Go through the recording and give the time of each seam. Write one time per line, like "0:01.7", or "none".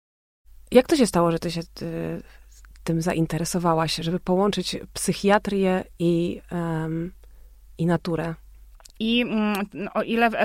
0:08.9